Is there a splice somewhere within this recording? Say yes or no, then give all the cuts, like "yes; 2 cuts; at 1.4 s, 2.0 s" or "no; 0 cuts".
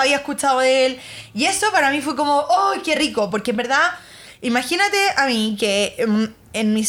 no; 0 cuts